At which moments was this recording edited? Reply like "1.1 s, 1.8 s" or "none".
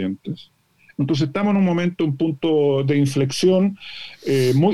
none